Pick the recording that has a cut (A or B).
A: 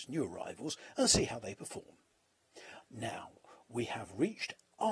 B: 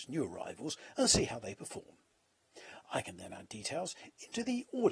A